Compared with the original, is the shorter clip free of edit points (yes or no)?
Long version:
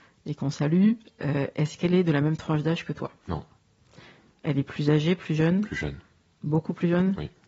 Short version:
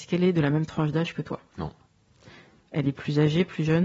yes